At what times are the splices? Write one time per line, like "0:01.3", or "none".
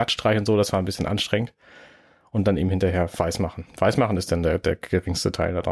none